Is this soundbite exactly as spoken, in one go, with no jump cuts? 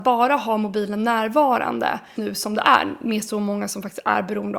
no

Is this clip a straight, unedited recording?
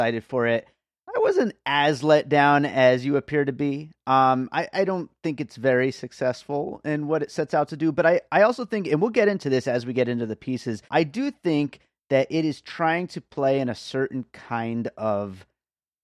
no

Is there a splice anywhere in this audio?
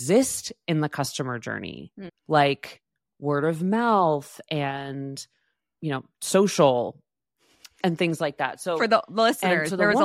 no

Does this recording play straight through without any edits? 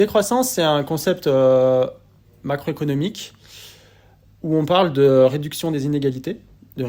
yes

